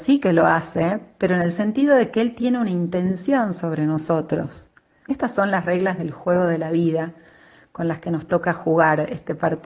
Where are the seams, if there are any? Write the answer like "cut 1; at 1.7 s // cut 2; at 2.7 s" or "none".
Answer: cut 1; at 5.0 s